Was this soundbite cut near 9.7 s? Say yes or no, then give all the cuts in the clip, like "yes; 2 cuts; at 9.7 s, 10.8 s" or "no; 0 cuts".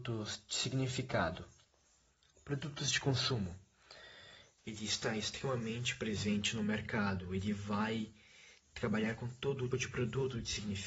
yes; 2 cuts; at 4.6 s, 9.7 s